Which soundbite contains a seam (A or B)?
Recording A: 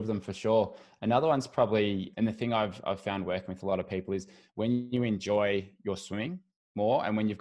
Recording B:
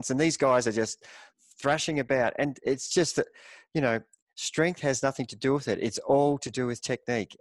A